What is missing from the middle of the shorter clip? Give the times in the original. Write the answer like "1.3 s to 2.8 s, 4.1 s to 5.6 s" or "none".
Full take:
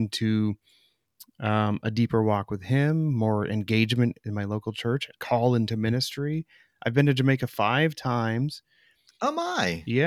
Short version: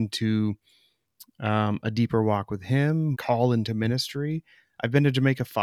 3.1 s to 5.1 s